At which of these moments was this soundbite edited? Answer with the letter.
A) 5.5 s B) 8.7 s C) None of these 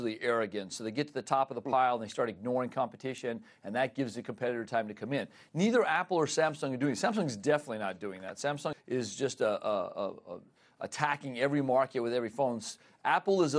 B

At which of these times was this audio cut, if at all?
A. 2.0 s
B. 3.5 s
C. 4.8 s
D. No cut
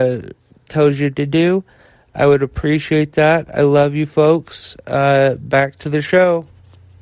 D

